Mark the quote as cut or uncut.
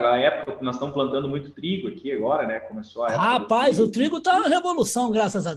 uncut